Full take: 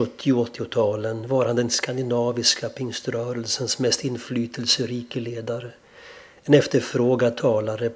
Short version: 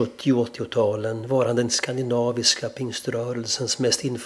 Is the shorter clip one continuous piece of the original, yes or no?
yes